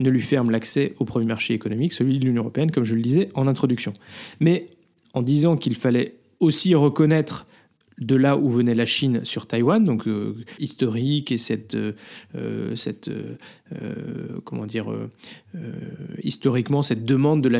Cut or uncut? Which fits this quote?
cut